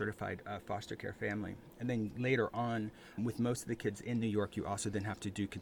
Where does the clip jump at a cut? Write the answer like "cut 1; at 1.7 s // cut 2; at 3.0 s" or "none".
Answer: cut 1; at 3.2 s

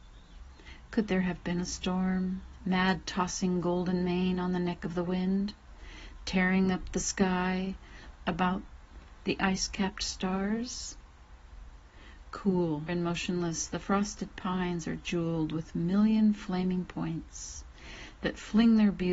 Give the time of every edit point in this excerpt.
cut 1; at 8.2 s // cut 2; at 12.9 s

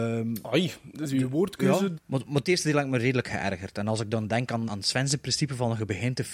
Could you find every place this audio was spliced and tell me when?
cut 1; at 1.9 s // cut 2; at 4.7 s

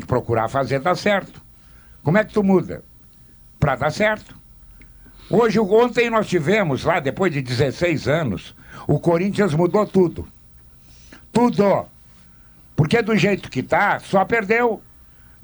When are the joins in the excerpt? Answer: cut 1; at 12.7 s

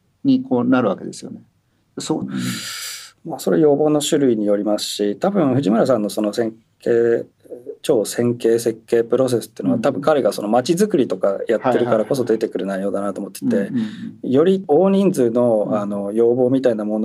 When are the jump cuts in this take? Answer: cut 1; at 2.2 s

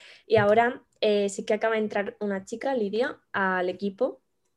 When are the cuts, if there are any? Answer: none

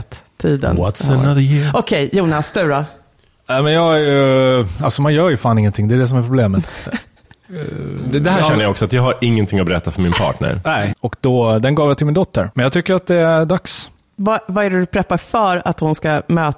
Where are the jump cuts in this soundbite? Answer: cut 1; at 10.9 s // cut 2; at 12.5 s

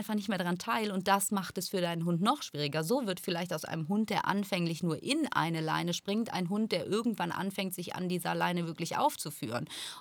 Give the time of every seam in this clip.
none

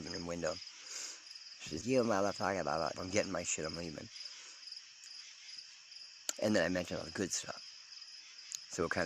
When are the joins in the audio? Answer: cut 1; at 1.8 s // cut 2; at 2.9 s // cut 3; at 6.4 s

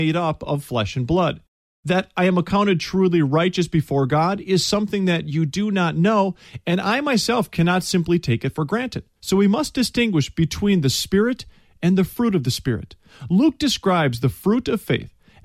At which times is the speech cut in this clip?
cut 1; at 9.2 s

